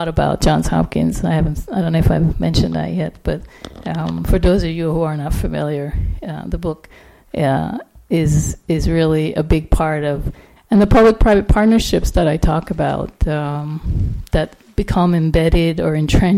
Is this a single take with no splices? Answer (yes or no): no